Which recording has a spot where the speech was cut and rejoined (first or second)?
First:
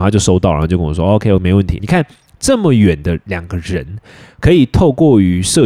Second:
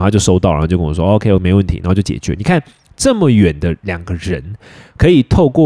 first